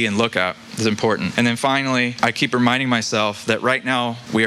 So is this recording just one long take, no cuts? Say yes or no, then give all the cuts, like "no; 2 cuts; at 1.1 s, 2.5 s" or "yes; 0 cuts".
yes; 0 cuts